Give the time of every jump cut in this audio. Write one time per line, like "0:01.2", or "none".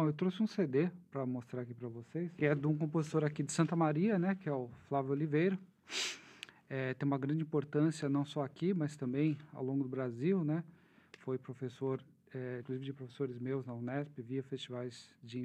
0:12.6